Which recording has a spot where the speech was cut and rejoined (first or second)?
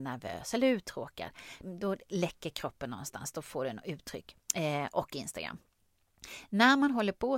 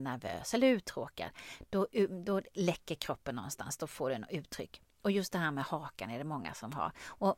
first